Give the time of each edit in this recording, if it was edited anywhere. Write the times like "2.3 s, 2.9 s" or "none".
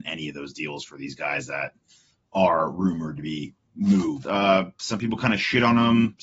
4.2 s